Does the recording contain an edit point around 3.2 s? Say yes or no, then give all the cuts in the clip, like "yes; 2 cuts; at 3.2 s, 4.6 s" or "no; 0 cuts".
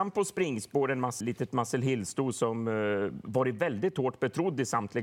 no; 1 cut; at 1.2 s